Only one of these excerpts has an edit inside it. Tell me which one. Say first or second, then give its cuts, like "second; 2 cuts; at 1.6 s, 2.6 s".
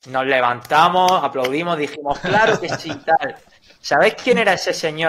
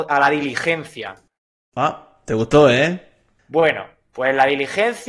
second; 1 cut; at 3.4 s